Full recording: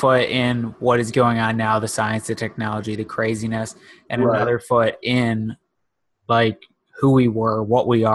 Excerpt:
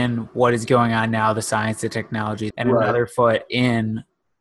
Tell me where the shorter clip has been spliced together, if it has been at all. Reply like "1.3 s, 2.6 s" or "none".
2.5 s